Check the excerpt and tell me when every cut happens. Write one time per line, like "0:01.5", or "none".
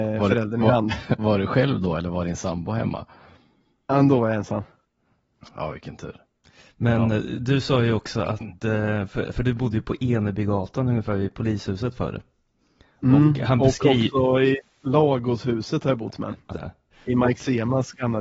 0:01.2
0:16.5